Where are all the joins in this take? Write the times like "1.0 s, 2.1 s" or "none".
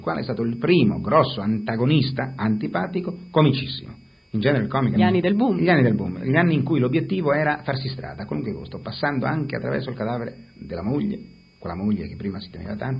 5.0 s

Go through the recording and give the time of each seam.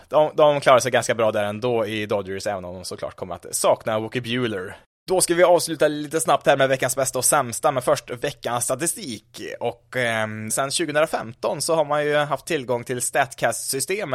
10.5 s

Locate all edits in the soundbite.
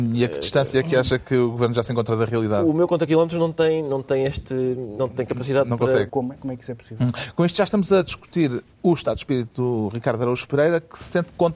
6.1 s

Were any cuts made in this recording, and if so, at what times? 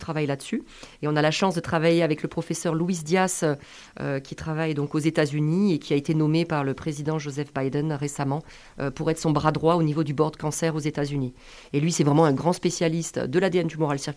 none

